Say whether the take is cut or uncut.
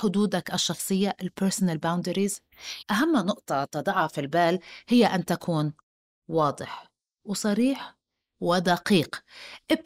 cut